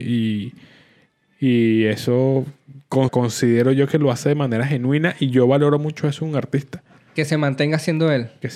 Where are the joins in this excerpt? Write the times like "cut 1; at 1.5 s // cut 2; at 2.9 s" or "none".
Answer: cut 1; at 3.1 s